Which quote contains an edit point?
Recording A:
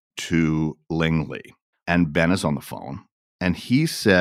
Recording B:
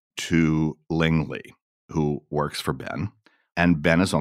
A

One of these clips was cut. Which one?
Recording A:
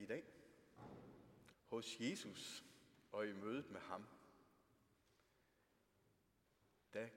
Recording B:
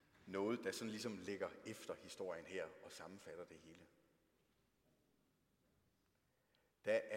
A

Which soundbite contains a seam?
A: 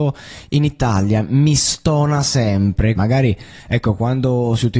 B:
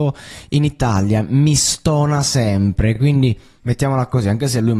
A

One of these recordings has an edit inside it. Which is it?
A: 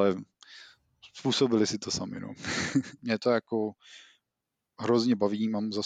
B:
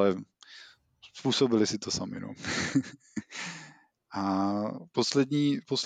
A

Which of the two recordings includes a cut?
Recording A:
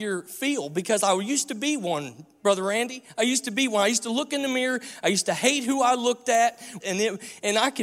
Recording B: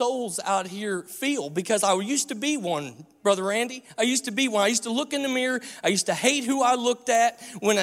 A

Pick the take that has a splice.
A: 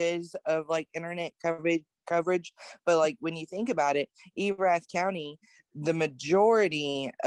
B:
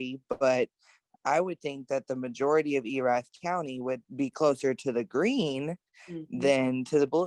B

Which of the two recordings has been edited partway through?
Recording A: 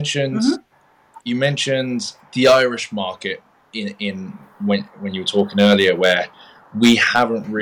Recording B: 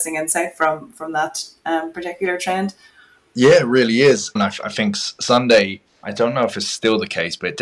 B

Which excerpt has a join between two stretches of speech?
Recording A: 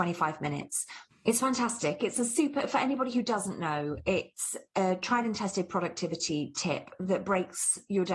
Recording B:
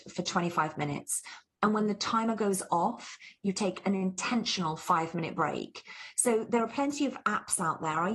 A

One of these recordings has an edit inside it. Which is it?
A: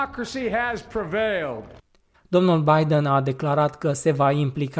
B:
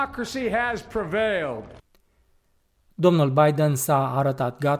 A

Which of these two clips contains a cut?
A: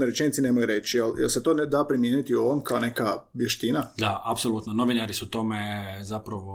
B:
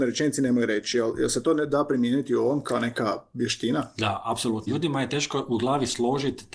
B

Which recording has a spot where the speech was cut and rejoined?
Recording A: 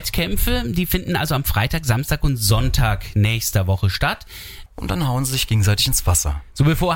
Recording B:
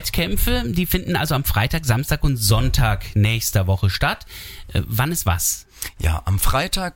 A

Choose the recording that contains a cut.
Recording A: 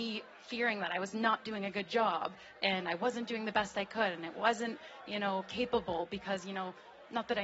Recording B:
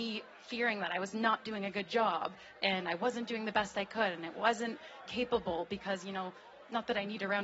B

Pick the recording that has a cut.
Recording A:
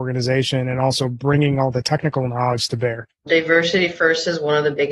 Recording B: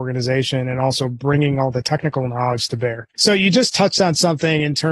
B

